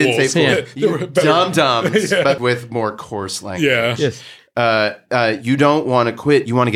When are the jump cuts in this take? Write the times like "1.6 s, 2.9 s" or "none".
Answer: 2.4 s